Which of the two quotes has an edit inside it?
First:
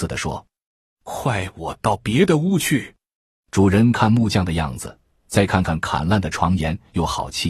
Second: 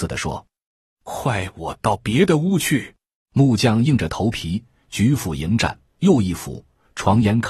second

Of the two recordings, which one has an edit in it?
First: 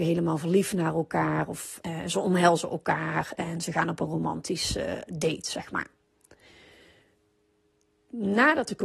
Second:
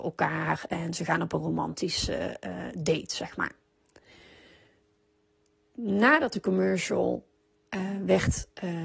first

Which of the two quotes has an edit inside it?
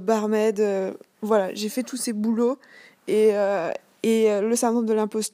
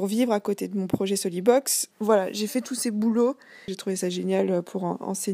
second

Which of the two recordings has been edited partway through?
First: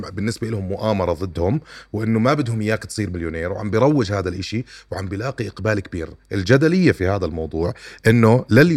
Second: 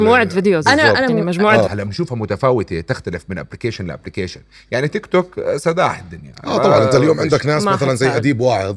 second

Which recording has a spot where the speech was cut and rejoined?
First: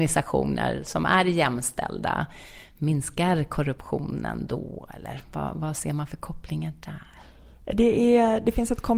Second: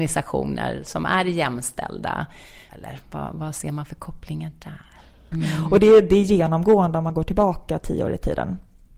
second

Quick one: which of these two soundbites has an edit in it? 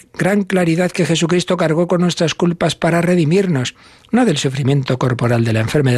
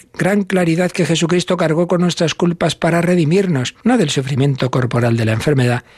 second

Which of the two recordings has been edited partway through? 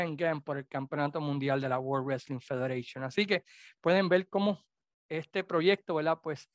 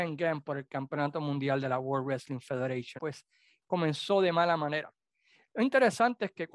second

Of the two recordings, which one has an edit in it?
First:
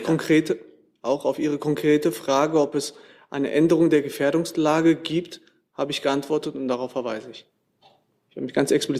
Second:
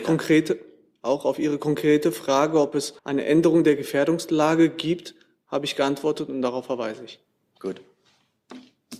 second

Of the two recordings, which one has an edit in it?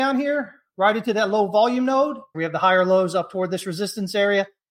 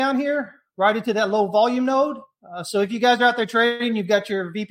first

